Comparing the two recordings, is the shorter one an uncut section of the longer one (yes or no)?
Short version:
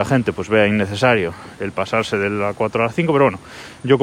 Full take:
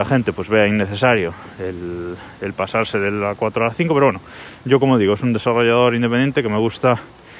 no